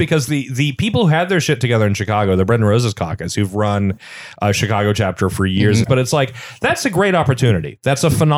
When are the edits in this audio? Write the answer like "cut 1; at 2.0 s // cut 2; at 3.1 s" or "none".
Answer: cut 1; at 5.8 s